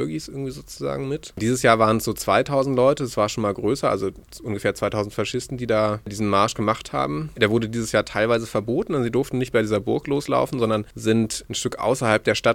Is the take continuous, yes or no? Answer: yes